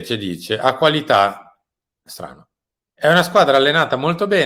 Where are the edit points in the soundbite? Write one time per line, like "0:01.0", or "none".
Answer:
none